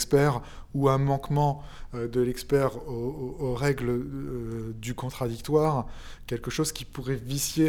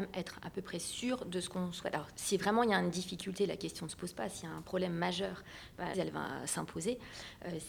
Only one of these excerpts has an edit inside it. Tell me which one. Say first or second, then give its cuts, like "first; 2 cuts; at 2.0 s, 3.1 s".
second; 1 cut; at 5.9 s